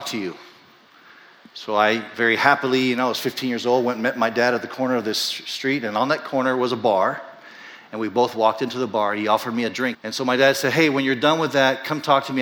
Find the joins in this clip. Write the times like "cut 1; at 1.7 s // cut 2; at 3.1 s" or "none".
cut 1; at 9.9 s